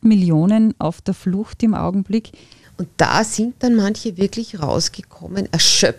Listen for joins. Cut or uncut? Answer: cut